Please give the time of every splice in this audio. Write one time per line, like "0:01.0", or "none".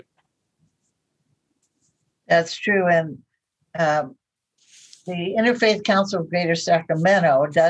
none